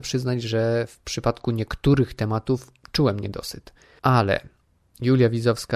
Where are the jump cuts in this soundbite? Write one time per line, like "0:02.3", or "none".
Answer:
none